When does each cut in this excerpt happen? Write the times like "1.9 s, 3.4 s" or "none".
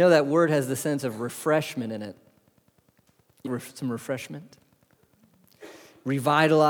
3.5 s